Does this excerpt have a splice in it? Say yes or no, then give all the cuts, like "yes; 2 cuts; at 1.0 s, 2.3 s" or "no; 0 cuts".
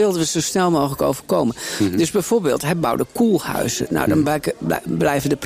no; 0 cuts